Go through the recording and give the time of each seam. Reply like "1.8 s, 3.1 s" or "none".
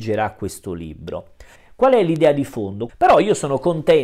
1.6 s, 2.9 s